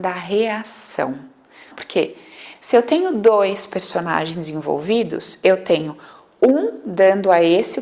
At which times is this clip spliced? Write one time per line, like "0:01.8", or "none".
0:01.7